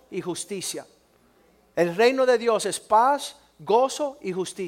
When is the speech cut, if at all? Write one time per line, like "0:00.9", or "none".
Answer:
none